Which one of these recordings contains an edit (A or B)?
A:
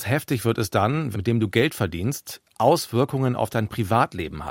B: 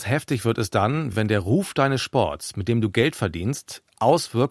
A